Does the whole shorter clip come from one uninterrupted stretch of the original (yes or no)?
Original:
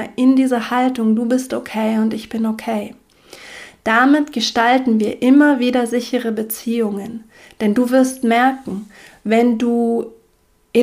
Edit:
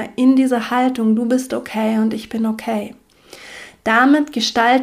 yes